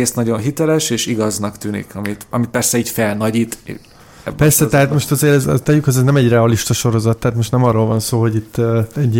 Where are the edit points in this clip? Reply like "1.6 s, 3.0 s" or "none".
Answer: 5.4 s